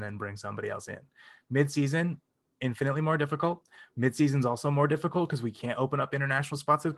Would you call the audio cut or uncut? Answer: uncut